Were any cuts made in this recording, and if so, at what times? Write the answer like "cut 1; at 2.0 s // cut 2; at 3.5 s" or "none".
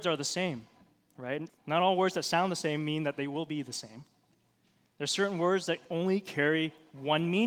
cut 1; at 1.5 s